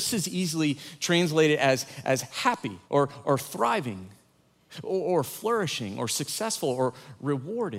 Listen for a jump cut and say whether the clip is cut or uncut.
cut